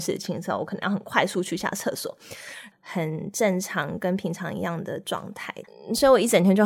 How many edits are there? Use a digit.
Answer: 1